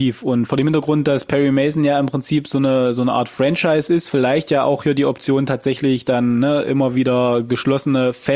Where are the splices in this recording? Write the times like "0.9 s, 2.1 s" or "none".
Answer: none